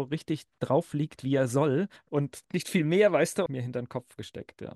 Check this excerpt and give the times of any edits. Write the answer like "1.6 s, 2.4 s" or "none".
3.5 s